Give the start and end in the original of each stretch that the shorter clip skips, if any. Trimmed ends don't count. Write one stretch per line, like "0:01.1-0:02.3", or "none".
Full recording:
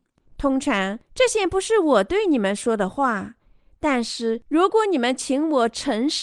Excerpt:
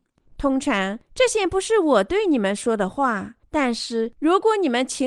0:03.4-0:03.7